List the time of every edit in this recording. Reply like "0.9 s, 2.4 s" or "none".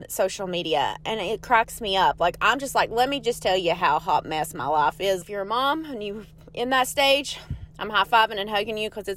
5.2 s, 7.7 s